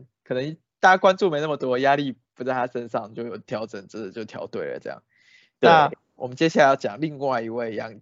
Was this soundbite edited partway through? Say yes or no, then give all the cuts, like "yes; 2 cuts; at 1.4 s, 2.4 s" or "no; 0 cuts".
no; 0 cuts